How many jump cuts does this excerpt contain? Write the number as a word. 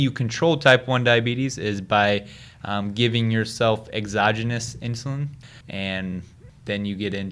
one